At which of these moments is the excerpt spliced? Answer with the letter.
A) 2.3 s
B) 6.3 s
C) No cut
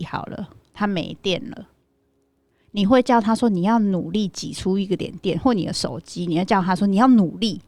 C